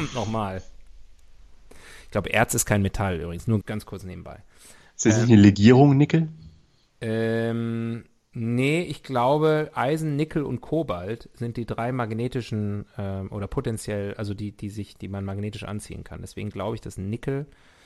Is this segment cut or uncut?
cut